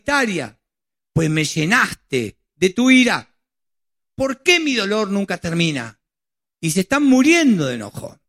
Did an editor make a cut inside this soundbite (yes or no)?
yes